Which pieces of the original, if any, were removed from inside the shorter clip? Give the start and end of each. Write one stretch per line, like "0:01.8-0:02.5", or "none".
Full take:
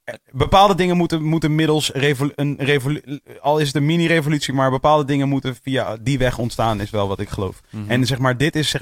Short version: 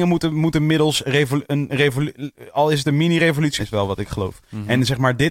0:04.5-0:06.8